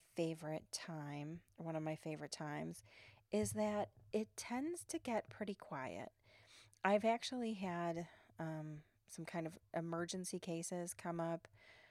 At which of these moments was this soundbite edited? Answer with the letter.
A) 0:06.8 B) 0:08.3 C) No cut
C